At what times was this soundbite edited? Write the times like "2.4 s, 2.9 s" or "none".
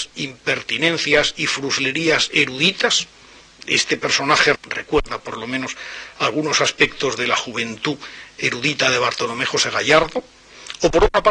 4.5 s